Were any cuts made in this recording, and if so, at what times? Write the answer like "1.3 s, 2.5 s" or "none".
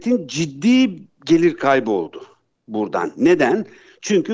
none